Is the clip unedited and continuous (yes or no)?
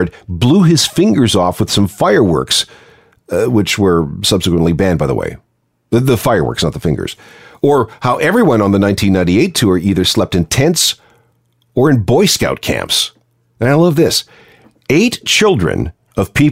yes